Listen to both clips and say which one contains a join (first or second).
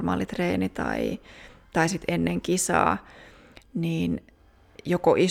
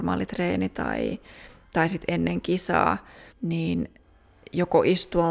second